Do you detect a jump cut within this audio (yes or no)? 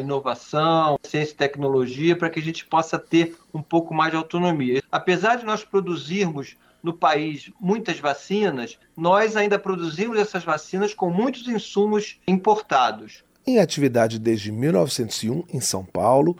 yes